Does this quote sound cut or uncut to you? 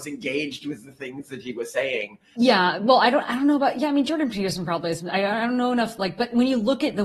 cut